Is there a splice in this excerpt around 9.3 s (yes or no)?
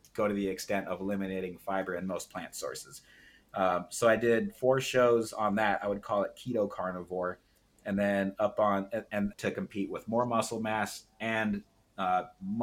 yes